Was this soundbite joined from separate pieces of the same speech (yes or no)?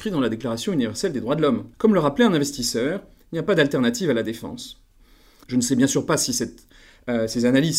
yes